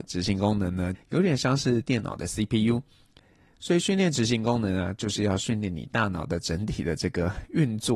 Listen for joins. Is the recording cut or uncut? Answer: cut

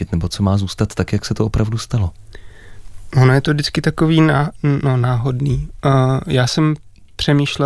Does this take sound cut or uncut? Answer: uncut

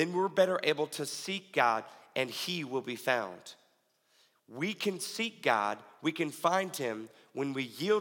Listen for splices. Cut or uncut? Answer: uncut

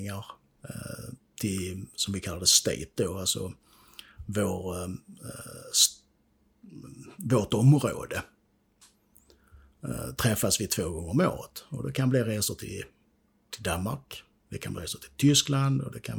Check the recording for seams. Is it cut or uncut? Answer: uncut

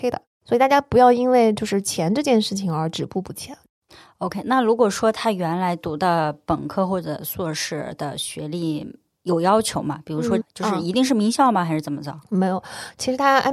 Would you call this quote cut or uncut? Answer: cut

